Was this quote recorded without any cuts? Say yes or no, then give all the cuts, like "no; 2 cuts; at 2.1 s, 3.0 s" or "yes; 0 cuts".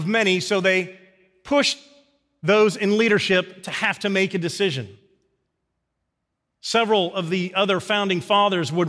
yes; 0 cuts